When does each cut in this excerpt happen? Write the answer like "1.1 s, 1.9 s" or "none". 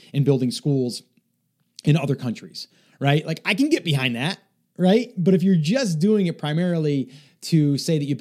none